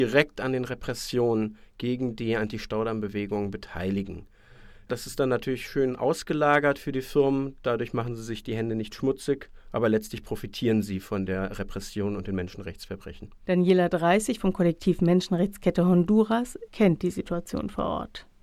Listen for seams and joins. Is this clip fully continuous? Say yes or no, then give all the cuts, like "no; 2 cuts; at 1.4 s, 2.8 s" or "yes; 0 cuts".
yes; 0 cuts